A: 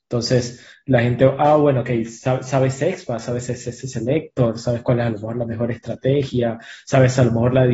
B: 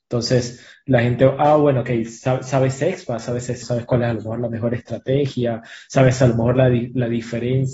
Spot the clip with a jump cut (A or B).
B